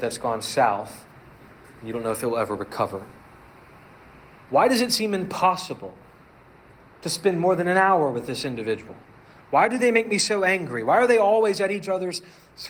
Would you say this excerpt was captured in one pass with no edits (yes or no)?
no